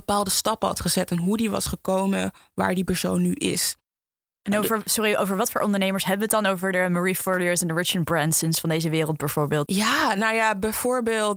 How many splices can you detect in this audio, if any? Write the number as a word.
one